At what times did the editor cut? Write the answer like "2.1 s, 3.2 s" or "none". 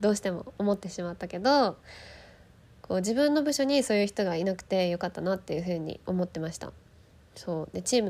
none